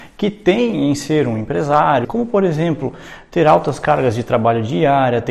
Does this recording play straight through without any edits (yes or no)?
no